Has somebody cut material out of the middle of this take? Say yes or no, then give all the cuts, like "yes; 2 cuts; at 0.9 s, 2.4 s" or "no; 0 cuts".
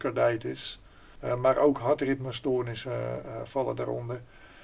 yes; 1 cut; at 1.2 s